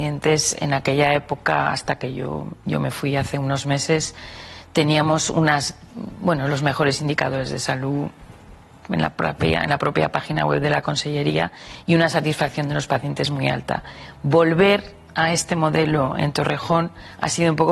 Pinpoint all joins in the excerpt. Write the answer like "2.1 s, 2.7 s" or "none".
none